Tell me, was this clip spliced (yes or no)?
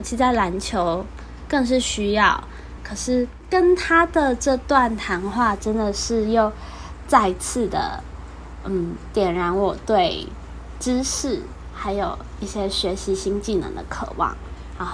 yes